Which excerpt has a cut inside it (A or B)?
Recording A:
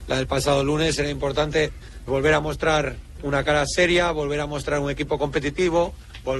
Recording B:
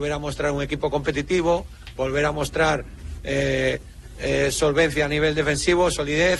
A